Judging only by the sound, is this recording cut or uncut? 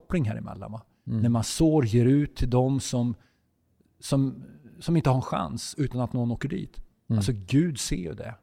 uncut